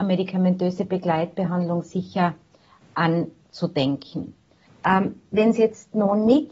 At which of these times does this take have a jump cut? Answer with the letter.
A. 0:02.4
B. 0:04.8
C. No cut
B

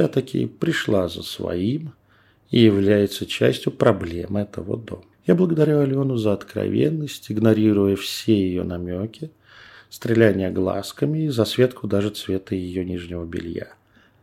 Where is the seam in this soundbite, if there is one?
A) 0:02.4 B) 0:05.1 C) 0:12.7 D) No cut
B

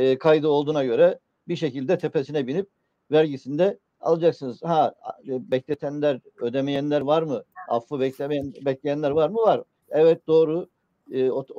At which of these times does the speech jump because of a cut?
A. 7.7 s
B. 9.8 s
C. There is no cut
B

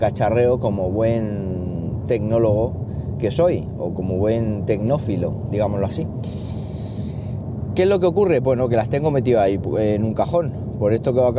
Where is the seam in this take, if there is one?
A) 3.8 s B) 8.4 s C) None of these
C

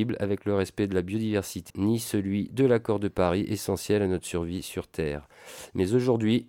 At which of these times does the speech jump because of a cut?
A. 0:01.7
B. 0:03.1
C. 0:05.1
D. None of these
A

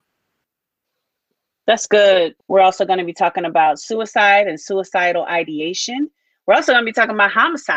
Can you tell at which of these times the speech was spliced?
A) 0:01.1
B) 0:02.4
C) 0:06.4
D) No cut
B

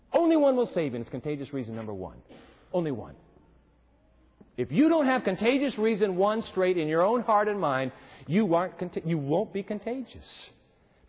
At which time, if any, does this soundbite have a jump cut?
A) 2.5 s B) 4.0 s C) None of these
C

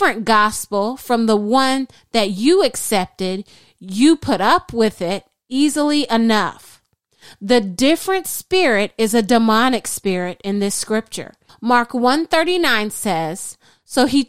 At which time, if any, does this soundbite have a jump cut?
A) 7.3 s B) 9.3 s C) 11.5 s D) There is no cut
C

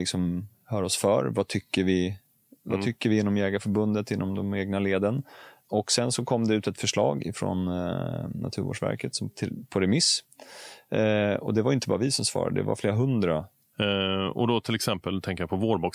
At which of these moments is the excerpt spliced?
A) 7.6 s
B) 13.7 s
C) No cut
B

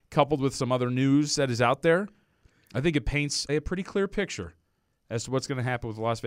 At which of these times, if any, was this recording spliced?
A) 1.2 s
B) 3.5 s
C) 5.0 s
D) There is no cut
B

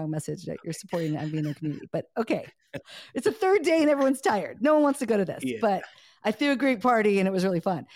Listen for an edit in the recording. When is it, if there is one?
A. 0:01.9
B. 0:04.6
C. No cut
C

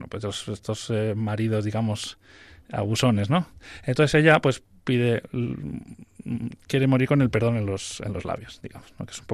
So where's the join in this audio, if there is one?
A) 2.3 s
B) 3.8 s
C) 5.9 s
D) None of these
D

